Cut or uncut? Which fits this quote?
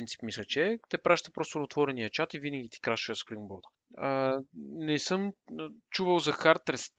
uncut